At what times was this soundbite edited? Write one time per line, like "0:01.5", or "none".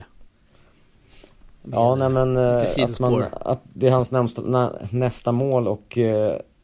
none

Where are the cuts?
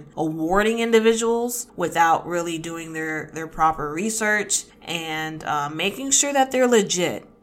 none

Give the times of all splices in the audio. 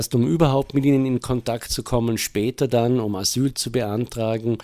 none

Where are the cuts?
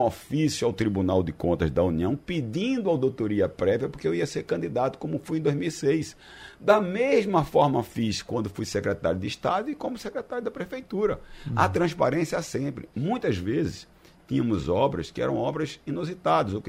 none

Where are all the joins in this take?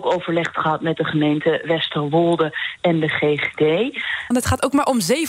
0:04.3

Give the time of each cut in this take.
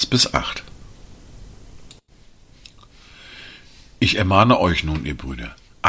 none

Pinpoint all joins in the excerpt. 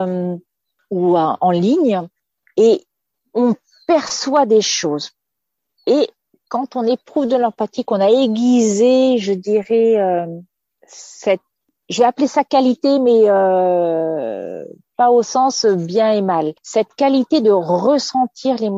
0:05.7

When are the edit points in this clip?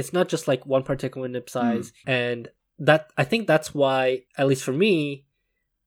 0:02.0
0:04.3

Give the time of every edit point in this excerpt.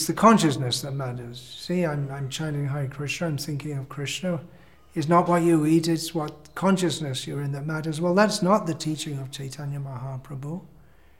none

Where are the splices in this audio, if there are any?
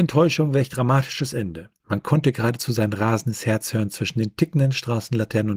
0:01.8

